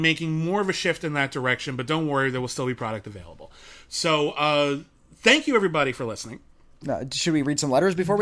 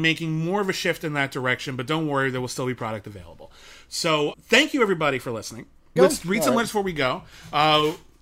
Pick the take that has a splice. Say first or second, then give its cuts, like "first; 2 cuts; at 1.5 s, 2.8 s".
second; 2 cuts; at 4.3 s, 6.0 s